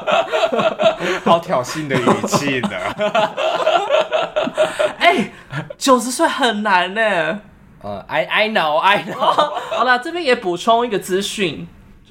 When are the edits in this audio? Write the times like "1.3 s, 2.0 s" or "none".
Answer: none